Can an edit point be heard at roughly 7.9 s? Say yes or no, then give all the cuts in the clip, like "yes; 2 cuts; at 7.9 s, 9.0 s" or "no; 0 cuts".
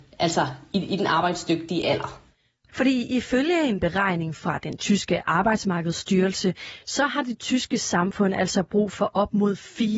no; 1 cut; at 2.7 s